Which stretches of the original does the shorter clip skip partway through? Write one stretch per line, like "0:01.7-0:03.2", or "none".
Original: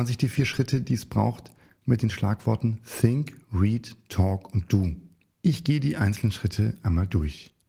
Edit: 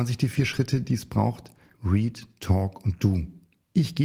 0:01.7-0:03.4

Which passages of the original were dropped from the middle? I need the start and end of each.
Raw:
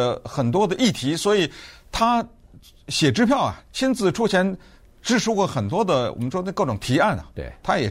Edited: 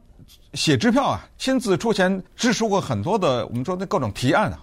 0:04.6-0:04.9

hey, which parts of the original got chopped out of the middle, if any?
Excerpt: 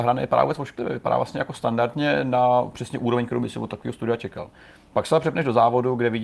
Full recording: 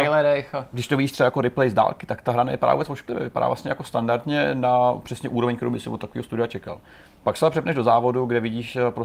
none

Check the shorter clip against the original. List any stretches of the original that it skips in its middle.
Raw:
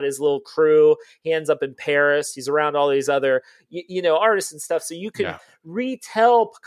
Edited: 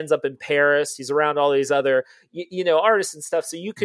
none

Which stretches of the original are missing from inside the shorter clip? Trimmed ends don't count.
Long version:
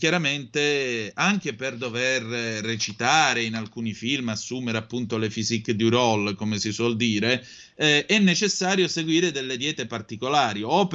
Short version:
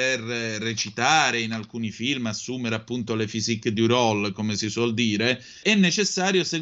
0:07.7-0:08.1

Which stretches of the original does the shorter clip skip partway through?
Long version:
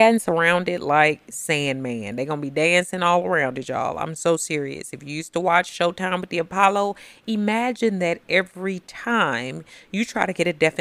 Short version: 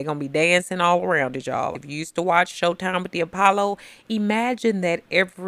0:03.9-0:04.9

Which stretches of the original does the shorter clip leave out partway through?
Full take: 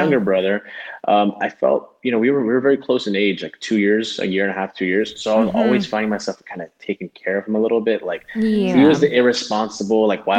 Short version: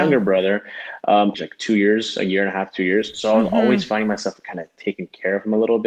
0:01.3-0:03.4

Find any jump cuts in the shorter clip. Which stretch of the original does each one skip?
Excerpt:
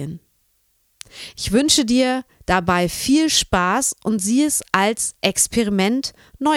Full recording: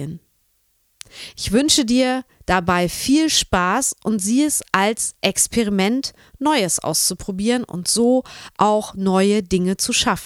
none

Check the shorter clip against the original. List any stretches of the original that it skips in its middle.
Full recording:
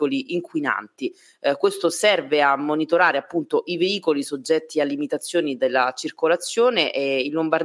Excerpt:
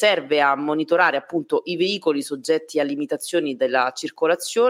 none

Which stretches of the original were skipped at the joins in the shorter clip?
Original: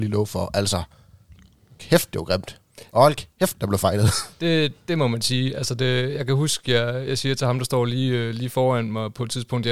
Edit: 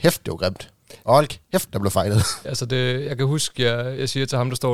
0:04.3-0:05.5

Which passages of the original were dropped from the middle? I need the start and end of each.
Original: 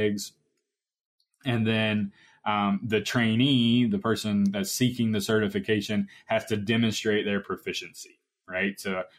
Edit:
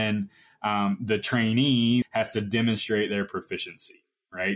0:03.8-0:06.2

